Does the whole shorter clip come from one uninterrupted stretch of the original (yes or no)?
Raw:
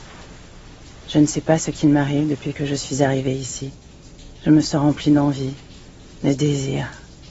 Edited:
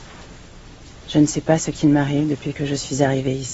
yes